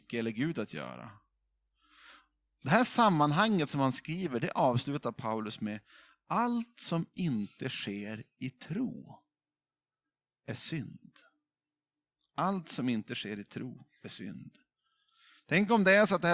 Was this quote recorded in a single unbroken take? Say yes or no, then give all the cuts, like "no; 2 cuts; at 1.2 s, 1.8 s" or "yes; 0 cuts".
yes; 0 cuts